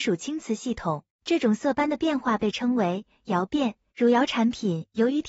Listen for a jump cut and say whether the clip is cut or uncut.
cut